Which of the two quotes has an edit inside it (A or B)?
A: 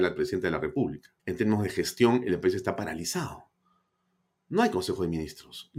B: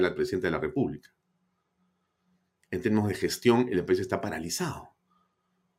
A